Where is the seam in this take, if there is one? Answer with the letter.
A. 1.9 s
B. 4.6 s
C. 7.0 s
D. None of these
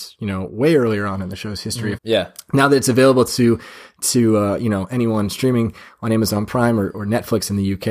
A